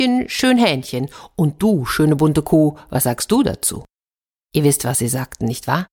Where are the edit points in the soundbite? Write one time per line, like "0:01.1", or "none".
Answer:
none